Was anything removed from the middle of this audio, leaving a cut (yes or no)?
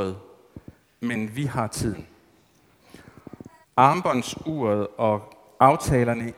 yes